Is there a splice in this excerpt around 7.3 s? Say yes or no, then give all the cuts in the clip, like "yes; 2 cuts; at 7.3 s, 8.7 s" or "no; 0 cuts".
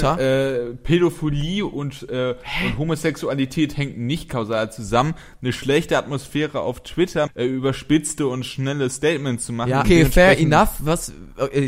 yes; 2 cuts; at 7.3 s, 9.8 s